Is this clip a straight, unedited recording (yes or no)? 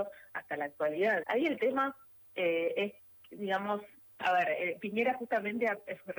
no